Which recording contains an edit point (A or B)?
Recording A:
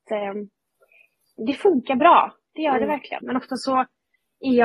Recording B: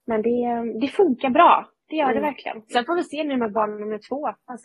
A